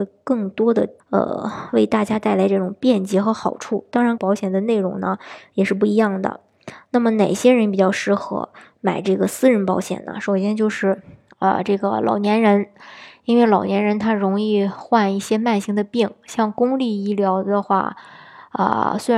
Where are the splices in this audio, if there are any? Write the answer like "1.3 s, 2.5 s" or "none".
1.0 s, 4.2 s